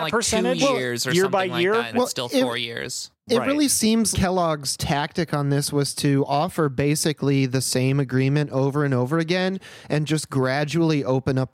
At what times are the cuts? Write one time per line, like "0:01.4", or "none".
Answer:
0:01.9
0:04.1